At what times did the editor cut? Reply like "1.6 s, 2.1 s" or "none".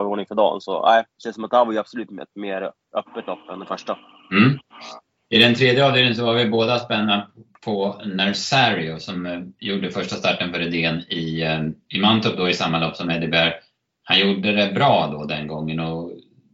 1.1 s

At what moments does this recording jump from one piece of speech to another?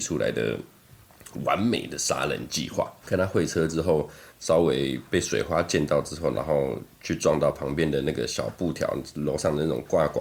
3.0 s, 4.3 s

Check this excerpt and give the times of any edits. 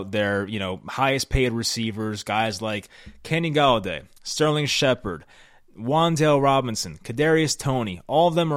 none

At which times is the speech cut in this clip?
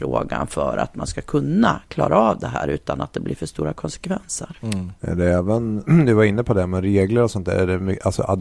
5.8 s

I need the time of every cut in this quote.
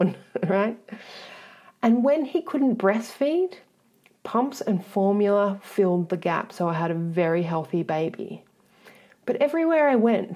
none

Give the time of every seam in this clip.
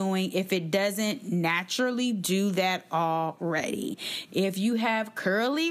4.3 s

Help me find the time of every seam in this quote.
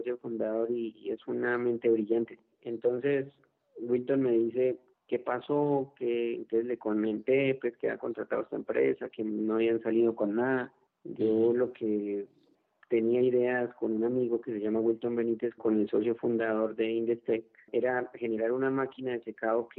10.9 s

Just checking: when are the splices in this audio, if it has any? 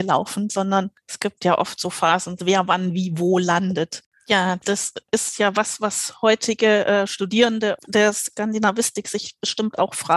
2.4 s, 4.1 s

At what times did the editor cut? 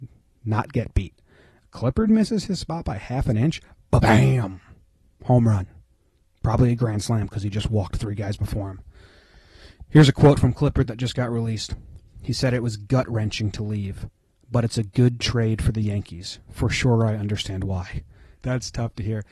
18.4 s

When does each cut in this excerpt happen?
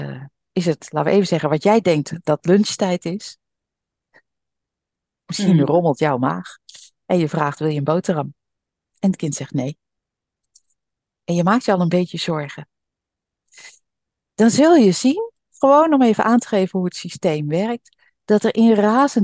none

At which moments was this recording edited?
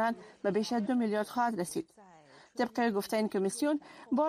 none

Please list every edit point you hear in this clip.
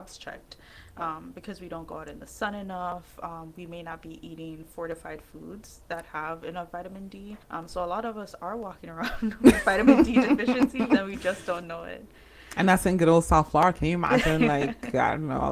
7.4 s

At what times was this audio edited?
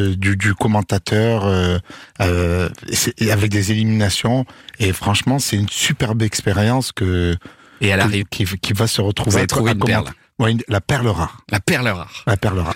8.2 s

